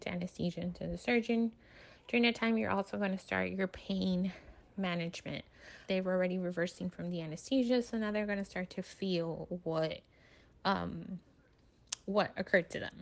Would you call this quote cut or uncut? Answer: cut